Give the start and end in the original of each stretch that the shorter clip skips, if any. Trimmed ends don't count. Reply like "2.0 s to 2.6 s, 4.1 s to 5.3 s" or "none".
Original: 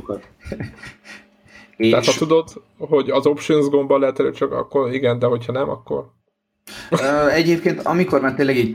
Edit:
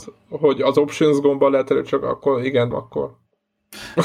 5.2 s to 5.7 s